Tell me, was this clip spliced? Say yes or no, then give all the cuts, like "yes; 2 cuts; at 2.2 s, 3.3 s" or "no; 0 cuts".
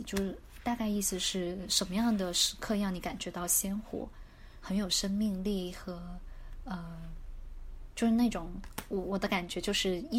yes; 1 cut; at 4.6 s